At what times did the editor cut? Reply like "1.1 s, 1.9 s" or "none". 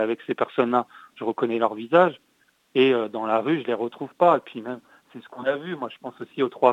none